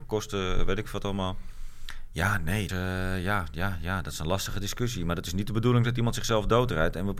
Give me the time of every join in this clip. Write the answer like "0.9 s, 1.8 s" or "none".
2.7 s